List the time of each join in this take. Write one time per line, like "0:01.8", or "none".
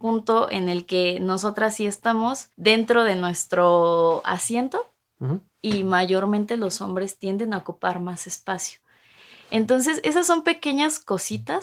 0:02.5